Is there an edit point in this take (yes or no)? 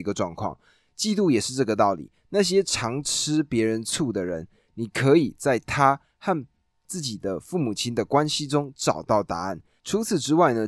no